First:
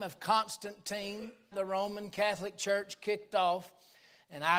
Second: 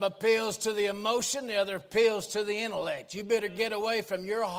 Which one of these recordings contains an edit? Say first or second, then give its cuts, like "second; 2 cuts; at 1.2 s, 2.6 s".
first; 1 cut; at 1.5 s